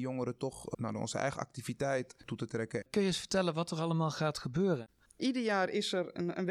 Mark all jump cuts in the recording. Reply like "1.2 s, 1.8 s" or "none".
2.8 s